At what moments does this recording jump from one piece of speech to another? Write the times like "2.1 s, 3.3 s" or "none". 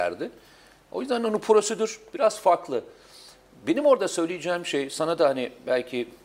none